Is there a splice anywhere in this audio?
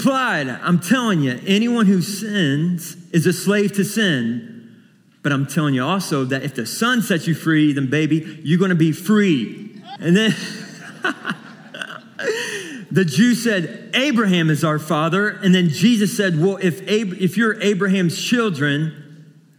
yes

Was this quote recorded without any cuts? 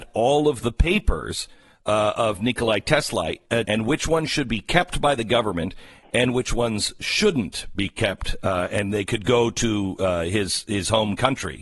no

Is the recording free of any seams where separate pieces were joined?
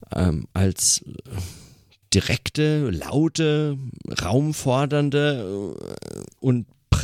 yes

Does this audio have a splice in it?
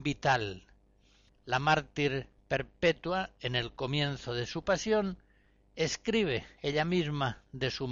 yes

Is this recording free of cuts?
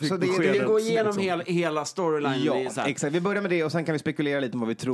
yes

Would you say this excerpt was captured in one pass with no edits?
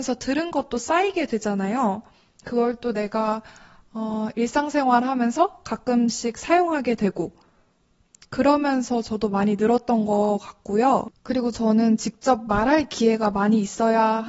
yes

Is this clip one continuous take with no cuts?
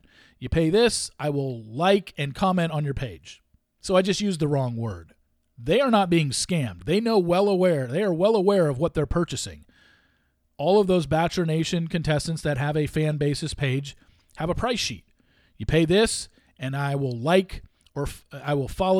no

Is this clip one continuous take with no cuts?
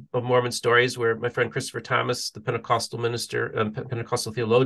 yes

